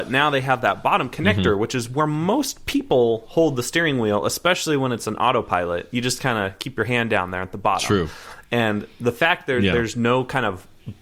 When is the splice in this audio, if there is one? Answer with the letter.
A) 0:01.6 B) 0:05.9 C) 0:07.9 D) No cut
D